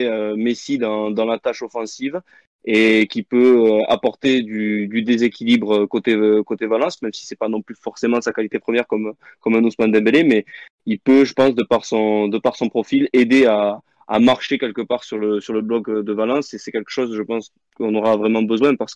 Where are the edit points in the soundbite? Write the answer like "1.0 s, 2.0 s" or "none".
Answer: none